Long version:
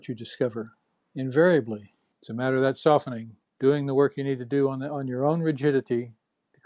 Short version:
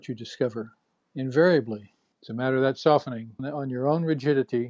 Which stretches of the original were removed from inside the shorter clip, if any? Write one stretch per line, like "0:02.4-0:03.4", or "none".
0:03.4-0:04.8